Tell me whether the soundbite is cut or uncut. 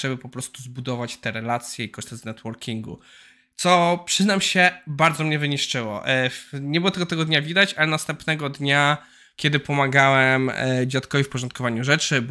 uncut